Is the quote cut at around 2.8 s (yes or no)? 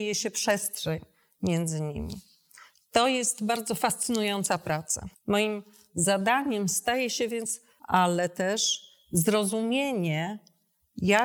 no